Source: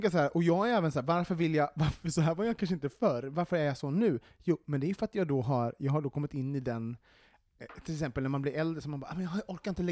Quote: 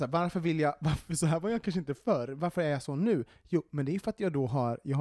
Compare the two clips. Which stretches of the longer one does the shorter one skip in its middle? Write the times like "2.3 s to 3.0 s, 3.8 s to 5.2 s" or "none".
none